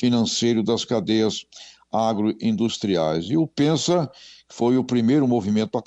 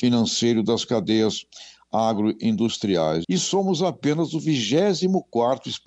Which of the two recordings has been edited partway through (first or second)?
second